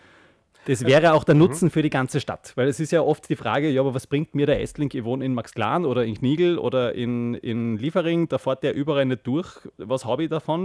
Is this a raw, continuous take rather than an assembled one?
yes; 0 cuts

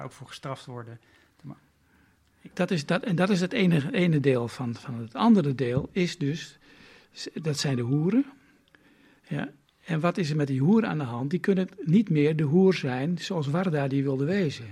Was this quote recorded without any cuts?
no; 1 cut; at 2.5 s

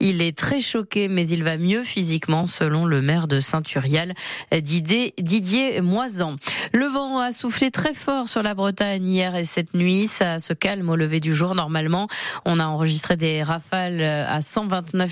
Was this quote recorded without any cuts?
yes; 0 cuts

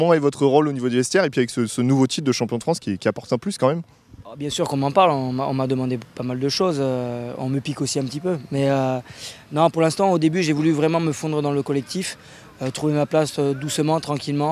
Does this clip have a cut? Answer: no; 0 cuts

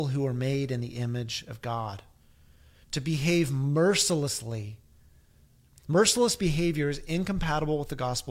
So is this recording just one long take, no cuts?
yes; 0 cuts

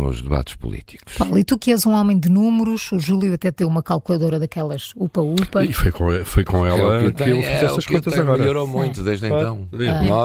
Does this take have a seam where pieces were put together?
no; 0 cuts

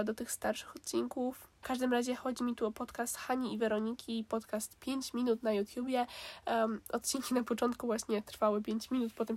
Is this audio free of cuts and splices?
no; 1 cut; at 1.6 s

